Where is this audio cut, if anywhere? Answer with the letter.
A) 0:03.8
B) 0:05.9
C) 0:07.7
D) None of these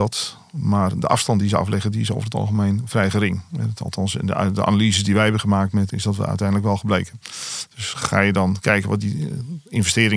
B